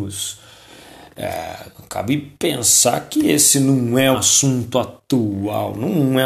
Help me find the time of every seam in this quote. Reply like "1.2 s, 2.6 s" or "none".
4.1 s